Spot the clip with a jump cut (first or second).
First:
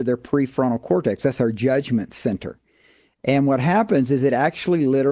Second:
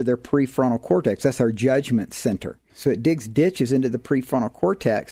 second